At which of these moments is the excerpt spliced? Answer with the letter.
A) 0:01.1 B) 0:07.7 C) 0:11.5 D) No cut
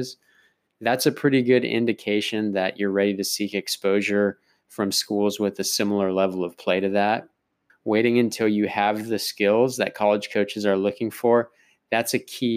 B